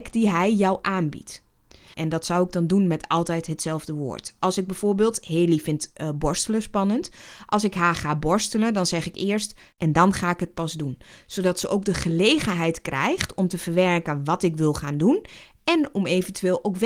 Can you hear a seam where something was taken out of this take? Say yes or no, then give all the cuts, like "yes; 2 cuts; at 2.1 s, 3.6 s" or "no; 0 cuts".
yes; 2 cuts; at 1.9 s, 9.7 s